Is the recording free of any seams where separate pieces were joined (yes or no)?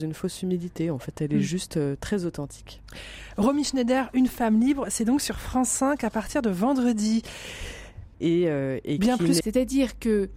no